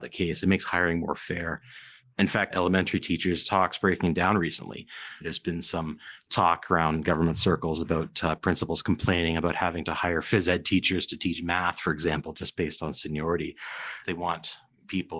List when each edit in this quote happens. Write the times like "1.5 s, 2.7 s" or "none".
2.5 s, 5.2 s, 14.0 s